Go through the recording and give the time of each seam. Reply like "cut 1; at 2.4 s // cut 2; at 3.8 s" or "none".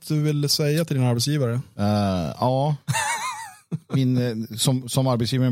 none